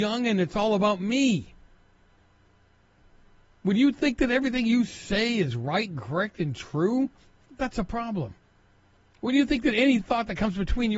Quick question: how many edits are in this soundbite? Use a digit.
0